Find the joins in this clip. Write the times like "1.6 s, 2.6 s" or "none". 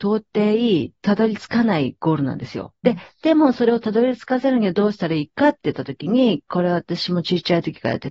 2.8 s